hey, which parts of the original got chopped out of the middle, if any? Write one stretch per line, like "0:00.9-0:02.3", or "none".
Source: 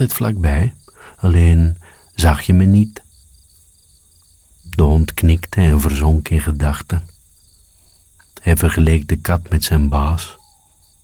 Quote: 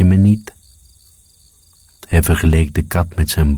0:04.4-0:08.2